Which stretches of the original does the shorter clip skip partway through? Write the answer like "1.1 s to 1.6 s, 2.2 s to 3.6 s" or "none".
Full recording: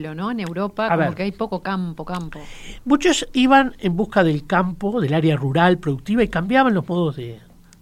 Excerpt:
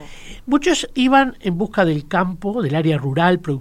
none